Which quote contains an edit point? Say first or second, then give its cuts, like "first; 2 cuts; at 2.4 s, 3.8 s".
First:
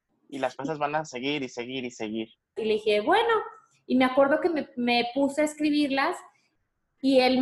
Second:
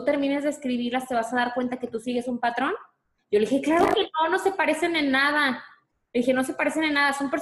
first; 1 cut; at 2.6 s